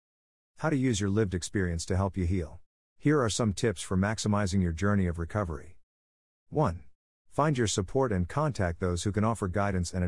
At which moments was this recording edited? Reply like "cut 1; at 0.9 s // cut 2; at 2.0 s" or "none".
cut 1; at 2.9 s // cut 2; at 7.1 s